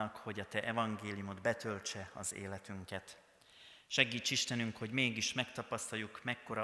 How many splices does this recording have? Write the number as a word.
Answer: zero